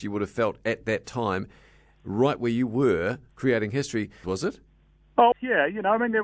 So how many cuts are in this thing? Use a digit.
2